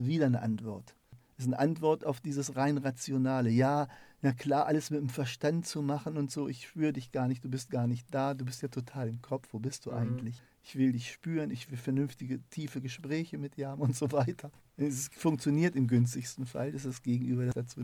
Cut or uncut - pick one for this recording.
cut